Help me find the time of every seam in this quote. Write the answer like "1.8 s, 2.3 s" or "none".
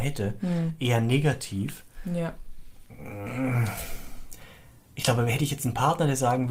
none